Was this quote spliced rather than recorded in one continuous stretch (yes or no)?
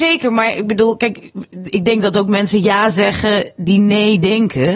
no